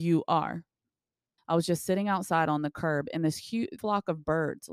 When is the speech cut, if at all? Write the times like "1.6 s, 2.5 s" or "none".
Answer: 1.4 s, 3.8 s